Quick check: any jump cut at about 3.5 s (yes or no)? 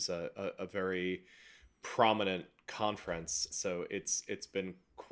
yes